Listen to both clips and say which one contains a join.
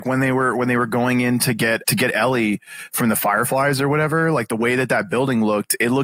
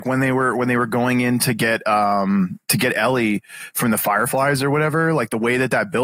first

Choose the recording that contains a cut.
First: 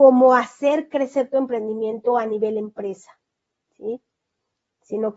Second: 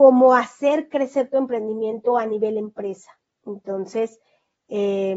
second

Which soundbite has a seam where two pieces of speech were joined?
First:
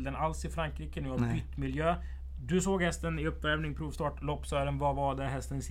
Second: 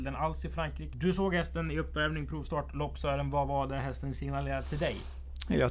second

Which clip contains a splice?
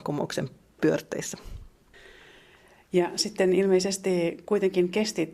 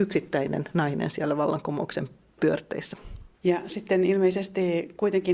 second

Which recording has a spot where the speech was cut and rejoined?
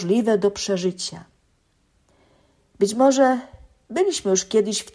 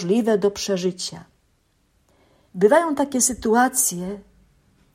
second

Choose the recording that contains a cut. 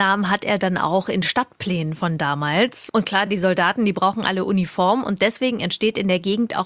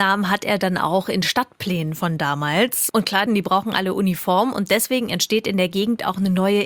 second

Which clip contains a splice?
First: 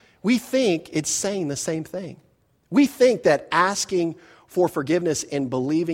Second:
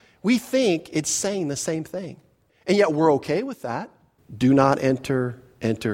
second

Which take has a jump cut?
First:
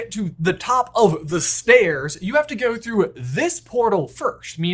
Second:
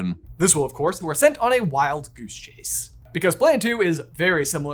second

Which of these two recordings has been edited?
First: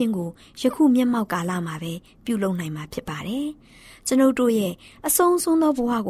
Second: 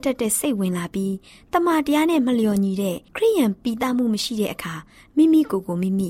second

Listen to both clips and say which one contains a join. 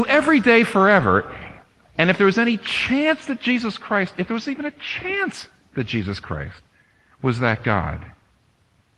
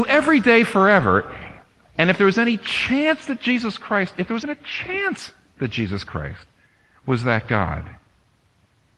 second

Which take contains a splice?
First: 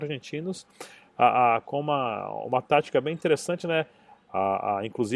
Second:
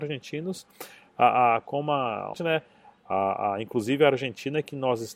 second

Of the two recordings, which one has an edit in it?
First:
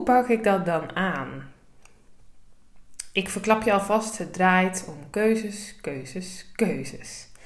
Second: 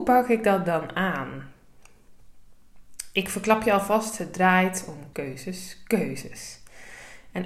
second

